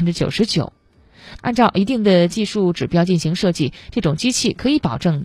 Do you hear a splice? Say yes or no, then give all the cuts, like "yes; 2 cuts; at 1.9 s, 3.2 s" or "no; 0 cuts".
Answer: yes; 1 cut; at 1.4 s